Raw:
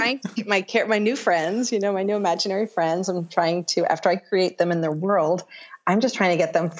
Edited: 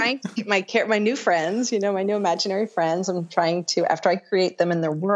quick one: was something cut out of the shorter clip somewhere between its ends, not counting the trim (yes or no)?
no